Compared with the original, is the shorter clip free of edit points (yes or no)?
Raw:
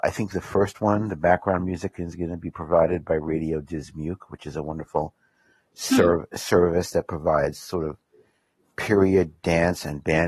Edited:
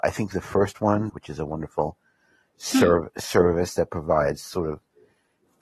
no